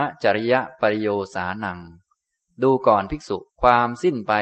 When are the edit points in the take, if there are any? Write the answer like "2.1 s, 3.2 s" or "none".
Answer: 3.5 s